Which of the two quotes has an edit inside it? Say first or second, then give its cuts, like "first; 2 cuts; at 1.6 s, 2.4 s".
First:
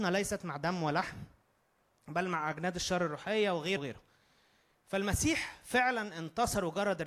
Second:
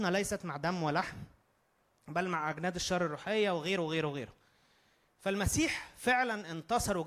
first; 1 cut; at 3.8 s